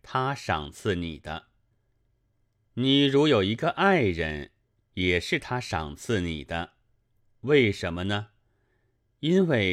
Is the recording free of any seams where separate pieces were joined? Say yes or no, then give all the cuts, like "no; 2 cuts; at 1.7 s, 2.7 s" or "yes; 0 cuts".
yes; 0 cuts